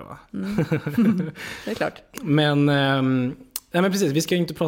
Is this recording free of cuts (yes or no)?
yes